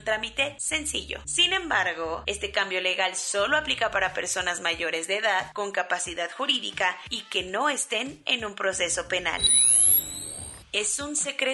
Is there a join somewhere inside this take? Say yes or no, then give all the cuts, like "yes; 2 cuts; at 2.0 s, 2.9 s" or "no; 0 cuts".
no; 0 cuts